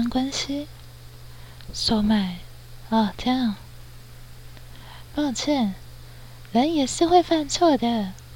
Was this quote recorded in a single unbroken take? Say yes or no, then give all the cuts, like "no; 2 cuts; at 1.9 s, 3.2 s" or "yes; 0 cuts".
no; 1 cut; at 5.1 s